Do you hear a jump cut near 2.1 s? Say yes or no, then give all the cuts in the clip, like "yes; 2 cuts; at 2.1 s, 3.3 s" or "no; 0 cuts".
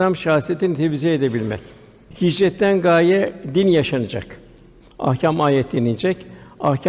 no; 0 cuts